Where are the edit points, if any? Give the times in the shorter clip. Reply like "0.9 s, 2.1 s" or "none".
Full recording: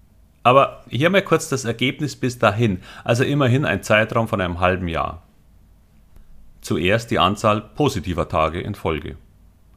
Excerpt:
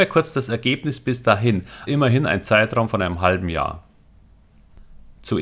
1.9 s